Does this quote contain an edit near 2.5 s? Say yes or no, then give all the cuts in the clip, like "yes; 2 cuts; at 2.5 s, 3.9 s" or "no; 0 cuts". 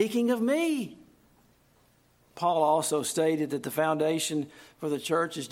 no; 0 cuts